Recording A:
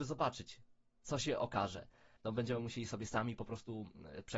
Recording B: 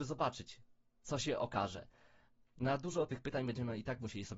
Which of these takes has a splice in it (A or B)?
A